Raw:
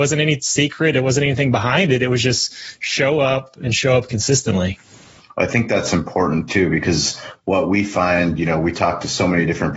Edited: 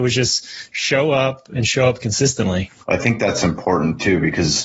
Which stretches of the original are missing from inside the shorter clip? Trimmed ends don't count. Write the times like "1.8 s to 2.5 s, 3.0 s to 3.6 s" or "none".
4.9 s to 5.3 s